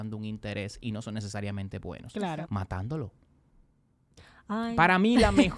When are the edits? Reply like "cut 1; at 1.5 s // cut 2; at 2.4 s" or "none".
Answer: cut 1; at 2.4 s